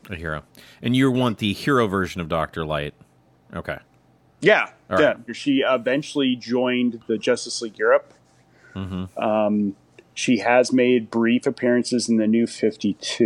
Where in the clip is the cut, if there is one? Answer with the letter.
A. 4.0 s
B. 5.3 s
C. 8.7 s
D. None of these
B